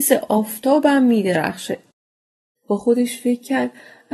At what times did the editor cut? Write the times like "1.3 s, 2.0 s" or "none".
2.6 s